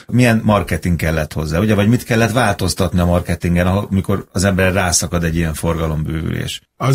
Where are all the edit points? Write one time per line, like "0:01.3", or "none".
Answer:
none